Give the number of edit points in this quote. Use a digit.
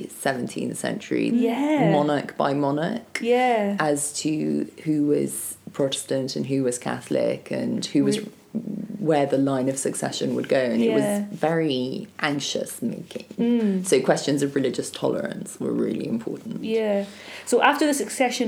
1